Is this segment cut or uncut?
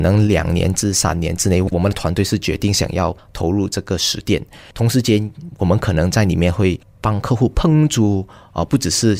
cut